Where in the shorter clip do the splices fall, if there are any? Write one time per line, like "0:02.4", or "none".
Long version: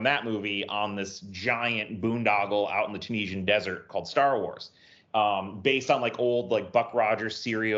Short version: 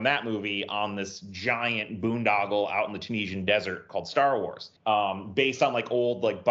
0:04.8